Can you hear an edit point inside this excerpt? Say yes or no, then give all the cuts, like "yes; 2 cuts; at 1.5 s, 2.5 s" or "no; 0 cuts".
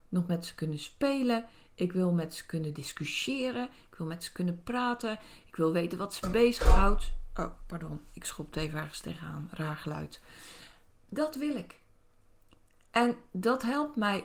no; 0 cuts